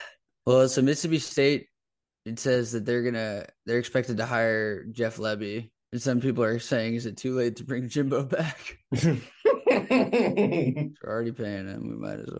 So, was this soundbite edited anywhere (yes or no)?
no